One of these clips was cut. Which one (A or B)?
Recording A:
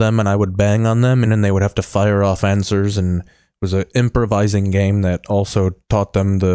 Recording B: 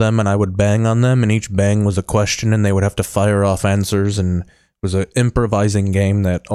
A